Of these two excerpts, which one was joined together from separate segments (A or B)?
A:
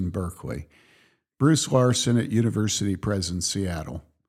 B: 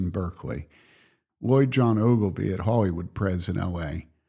B